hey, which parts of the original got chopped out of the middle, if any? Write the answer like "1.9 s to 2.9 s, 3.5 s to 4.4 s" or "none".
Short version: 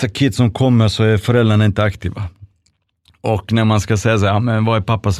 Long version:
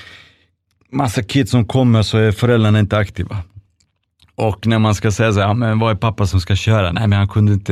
none

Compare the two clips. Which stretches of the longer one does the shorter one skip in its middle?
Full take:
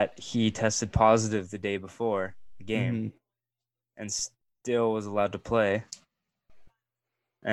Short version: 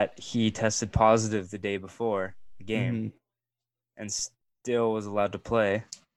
none

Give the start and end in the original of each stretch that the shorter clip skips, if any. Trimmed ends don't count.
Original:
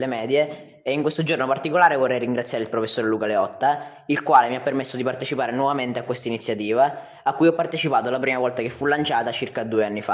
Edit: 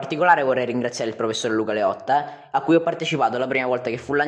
4.0 s to 7.2 s

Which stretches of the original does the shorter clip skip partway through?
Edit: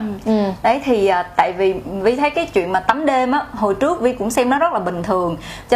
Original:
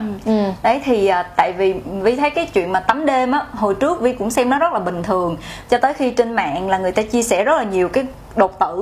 none

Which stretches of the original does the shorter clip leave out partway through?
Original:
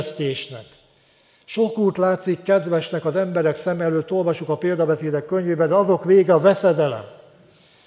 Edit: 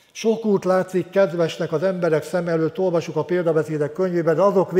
none

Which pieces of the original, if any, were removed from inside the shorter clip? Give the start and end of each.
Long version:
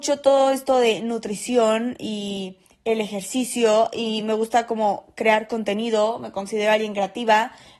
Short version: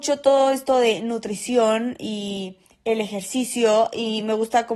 none

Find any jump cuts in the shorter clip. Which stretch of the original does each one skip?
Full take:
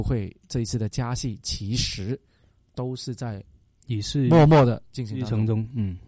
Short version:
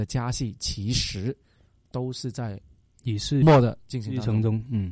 4.3 s to 4.5 s

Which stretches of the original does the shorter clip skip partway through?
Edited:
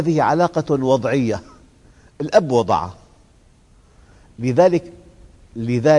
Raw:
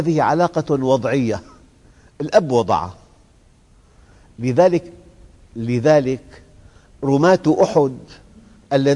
none

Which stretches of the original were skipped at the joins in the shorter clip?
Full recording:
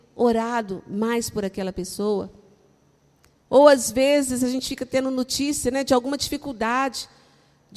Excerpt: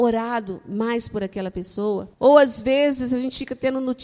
2.3 s to 3.4 s

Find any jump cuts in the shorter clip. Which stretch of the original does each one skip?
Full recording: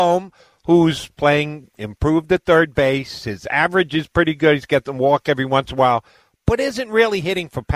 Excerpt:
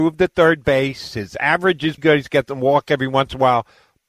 4.1 s to 4.4 s

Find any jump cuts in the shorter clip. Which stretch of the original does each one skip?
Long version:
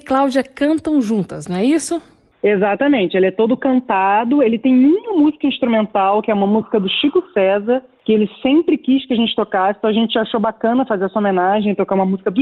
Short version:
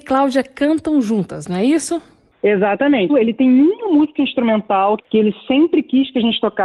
3.1 s to 4.3 s, 6.2 s to 7.9 s

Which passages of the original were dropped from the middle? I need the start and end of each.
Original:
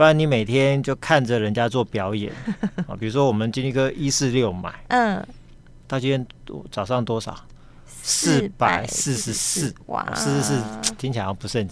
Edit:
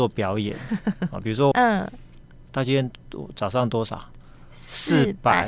3.3 s to 4.9 s

